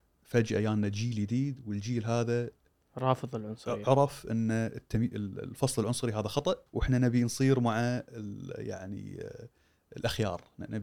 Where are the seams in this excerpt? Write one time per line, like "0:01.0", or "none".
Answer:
0:06.7